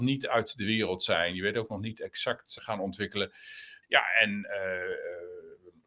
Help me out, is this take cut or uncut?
cut